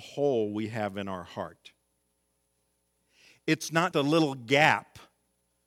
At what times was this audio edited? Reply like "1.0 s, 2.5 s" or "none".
3.9 s